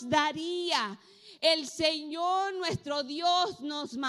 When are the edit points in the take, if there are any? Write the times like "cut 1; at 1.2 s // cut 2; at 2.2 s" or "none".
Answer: none

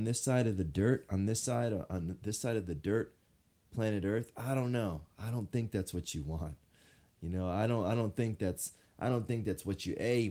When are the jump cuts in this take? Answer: none

